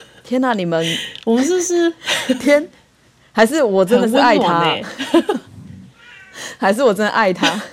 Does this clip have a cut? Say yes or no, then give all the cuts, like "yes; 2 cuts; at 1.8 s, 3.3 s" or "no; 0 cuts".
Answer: no; 0 cuts